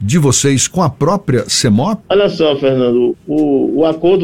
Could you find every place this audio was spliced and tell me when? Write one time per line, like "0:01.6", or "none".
0:02.0
0:03.1